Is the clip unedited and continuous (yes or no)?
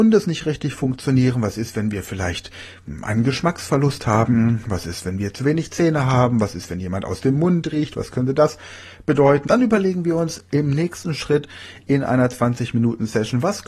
no